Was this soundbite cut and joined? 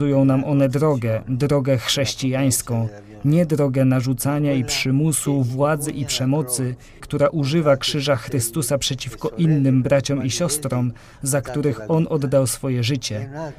yes; 1 cut; at 7.0 s

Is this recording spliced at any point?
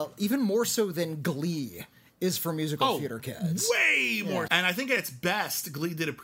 yes; 1 cut; at 4.5 s

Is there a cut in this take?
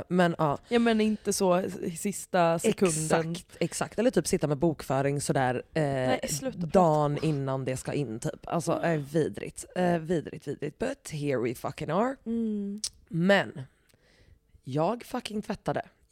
no; 0 cuts

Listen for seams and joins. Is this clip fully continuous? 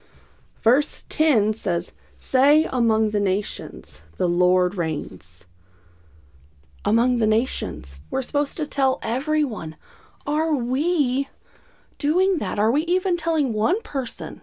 no; 1 cut; at 8.0 s

